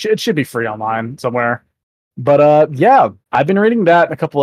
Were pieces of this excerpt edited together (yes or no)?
yes